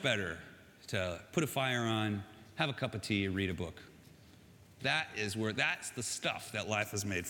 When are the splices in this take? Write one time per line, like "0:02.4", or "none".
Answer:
0:04.8